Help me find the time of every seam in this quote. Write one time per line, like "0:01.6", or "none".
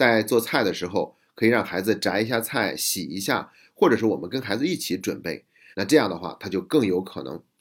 0:05.7